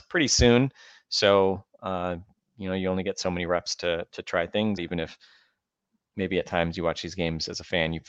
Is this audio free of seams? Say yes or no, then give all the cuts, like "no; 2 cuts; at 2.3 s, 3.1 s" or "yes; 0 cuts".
no; 1 cut; at 4.8 s